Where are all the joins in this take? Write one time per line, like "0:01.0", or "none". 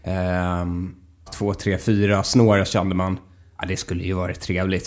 0:01.3